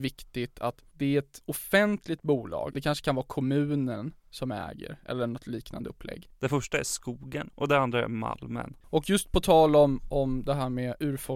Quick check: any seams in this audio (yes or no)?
yes